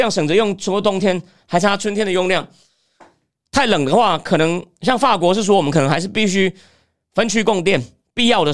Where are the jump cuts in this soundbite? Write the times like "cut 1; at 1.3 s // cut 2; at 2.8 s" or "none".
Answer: cut 1; at 3.5 s

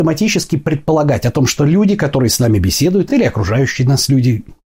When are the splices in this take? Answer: none

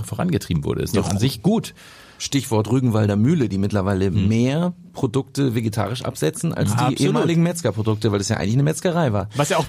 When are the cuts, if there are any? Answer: none

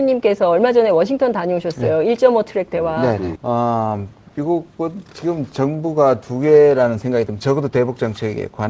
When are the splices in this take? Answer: cut 1; at 3.3 s

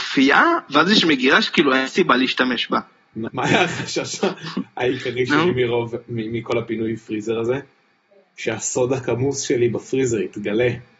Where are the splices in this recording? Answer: cut 1; at 3.3 s

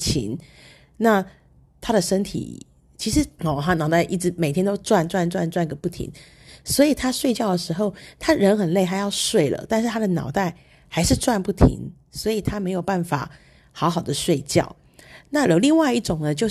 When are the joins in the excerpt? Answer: cut 1; at 3.4 s

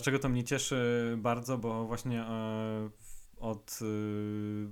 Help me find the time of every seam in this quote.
none

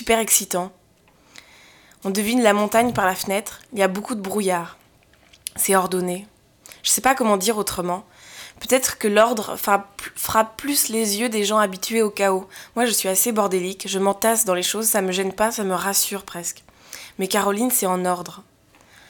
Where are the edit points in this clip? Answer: none

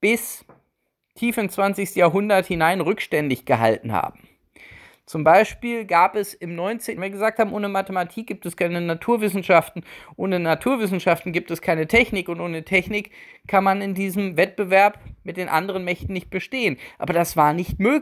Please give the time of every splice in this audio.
cut 1; at 7.0 s

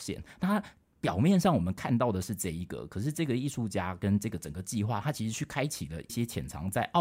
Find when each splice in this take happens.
cut 1; at 6.1 s

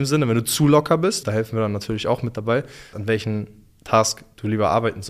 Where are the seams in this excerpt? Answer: cut 1; at 1.2 s // cut 2; at 2.9 s

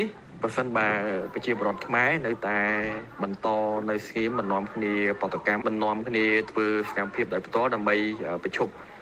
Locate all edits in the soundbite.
cut 1; at 5.6 s

